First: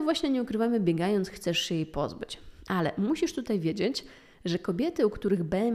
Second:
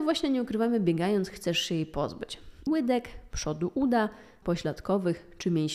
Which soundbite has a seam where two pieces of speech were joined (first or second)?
second